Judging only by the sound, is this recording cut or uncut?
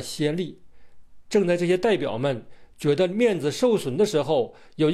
uncut